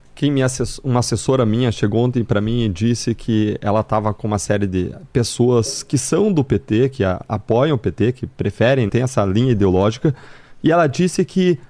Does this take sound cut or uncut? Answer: cut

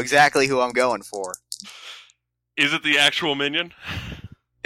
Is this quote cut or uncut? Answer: uncut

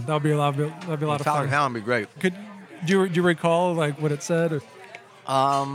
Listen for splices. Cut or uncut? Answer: cut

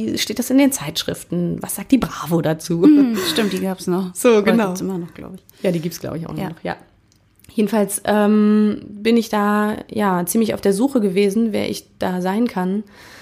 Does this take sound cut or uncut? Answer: uncut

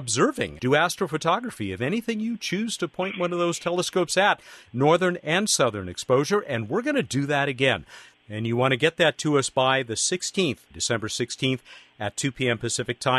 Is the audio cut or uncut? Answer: cut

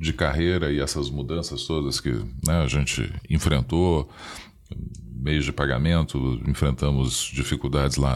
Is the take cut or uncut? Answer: uncut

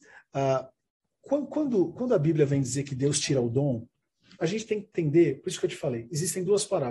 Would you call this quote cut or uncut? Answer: uncut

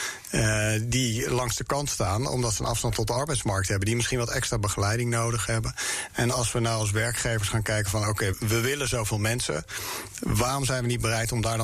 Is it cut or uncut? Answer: cut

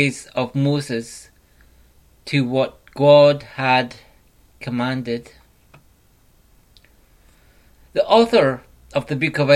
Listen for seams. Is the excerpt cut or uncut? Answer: uncut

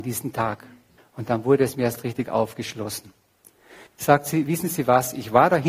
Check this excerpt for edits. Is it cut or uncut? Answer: cut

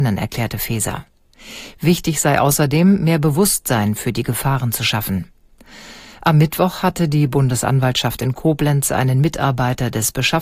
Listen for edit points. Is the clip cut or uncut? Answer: uncut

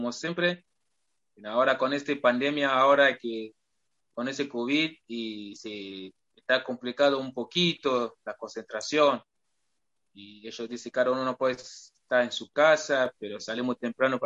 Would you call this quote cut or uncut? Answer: uncut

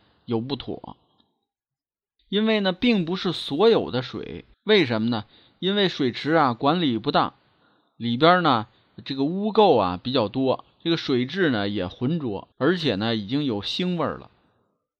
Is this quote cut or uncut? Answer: cut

